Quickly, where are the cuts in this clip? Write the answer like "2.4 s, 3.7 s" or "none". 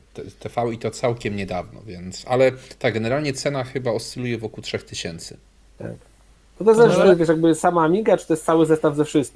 none